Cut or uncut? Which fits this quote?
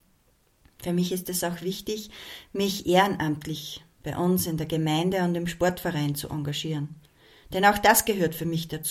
uncut